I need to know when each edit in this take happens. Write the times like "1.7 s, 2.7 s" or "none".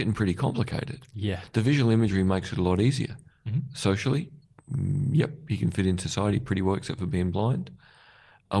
3.3 s